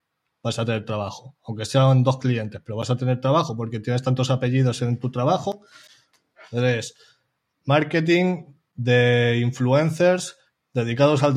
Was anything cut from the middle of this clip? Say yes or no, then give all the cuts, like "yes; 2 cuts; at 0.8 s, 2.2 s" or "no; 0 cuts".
no; 0 cuts